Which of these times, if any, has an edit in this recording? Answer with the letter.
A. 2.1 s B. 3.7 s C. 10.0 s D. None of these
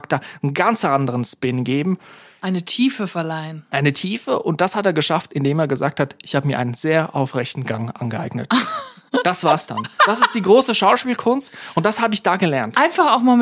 D